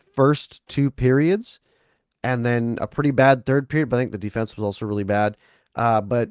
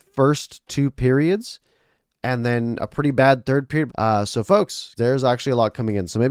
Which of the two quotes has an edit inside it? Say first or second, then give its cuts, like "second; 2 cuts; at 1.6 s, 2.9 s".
second; 2 cuts; at 3.9 s, 5.0 s